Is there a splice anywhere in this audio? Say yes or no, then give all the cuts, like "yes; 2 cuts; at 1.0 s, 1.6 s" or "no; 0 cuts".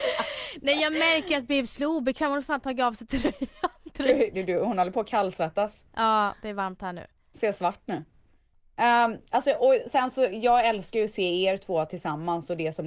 no; 0 cuts